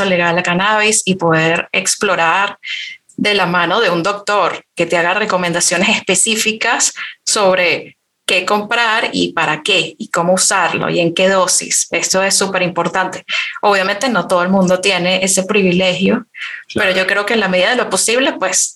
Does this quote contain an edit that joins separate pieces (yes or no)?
no